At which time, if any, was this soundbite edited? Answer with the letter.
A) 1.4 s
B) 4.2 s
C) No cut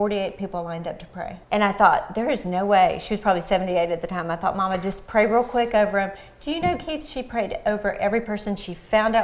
A